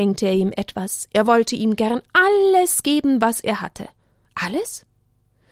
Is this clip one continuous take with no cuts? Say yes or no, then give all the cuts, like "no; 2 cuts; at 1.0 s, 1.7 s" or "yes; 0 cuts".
yes; 0 cuts